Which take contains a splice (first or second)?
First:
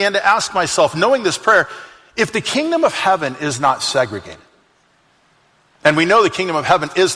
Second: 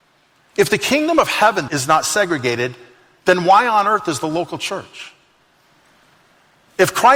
second